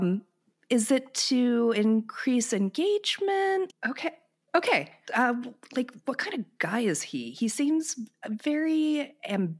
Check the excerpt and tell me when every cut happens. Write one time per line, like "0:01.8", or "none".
0:03.7
0:05.0